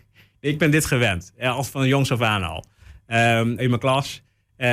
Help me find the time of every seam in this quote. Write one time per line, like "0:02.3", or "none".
0:03.6

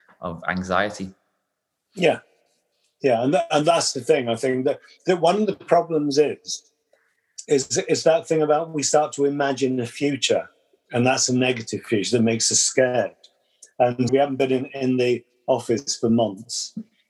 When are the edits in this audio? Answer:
0:14.1

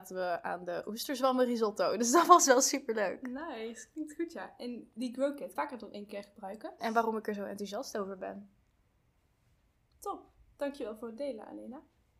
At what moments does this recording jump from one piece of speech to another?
0:05.6
0:06.8

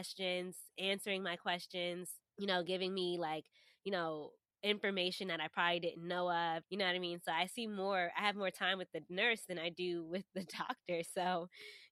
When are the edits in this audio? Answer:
0:02.3
0:06.6

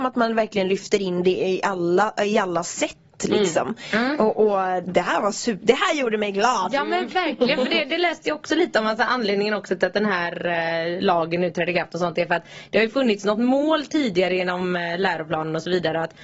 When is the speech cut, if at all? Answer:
0:04.9

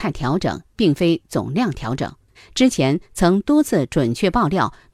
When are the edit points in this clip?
0:02.3

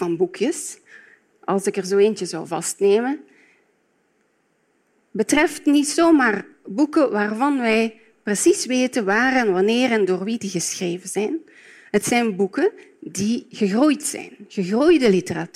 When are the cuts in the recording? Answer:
none

